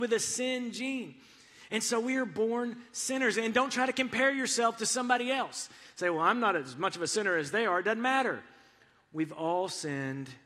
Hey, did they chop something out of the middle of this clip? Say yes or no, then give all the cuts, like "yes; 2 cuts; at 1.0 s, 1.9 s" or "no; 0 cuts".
no; 0 cuts